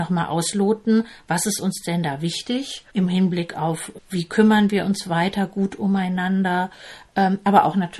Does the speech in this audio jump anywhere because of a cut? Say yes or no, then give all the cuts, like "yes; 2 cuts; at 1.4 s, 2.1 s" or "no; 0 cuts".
yes; 2 cuts; at 2.9 s, 4.0 s